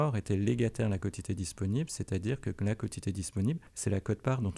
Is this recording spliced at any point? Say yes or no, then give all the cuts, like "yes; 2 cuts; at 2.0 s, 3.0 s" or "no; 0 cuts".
no; 0 cuts